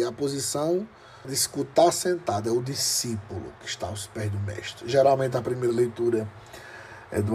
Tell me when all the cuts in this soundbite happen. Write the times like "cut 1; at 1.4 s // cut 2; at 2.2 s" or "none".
cut 1; at 1.2 s